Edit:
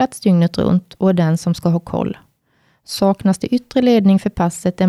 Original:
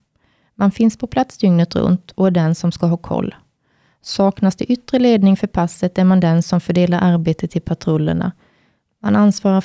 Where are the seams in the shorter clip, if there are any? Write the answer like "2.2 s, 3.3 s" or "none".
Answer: none